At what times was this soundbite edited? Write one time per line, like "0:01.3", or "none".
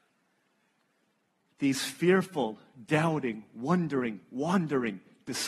none